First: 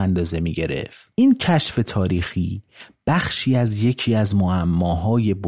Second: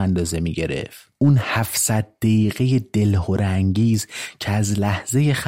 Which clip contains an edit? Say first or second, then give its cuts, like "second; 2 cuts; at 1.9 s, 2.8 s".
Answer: first; 1 cut; at 1.1 s